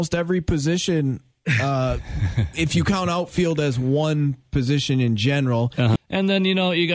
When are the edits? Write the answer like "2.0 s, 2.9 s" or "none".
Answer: 6.0 s